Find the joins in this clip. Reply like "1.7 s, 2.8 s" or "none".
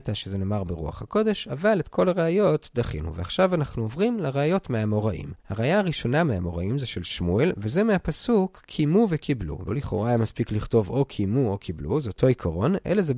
5.4 s, 9.7 s